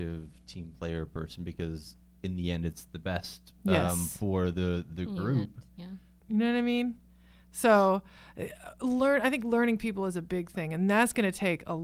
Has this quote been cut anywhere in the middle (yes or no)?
yes